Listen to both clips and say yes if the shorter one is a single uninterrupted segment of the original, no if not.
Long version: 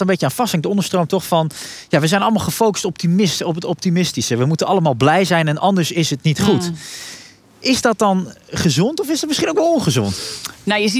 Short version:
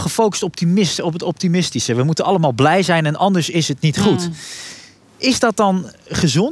yes